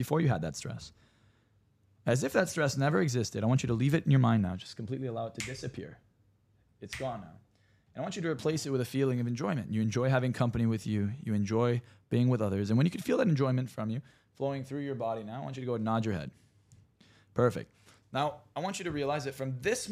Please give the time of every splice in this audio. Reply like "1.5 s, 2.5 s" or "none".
none